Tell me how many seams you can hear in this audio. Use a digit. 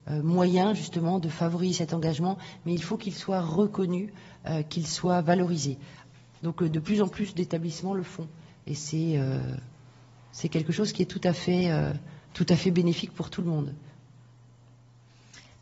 1